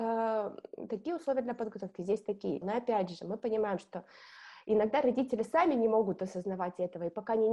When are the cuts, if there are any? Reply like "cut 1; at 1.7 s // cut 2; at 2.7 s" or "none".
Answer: cut 1; at 2.6 s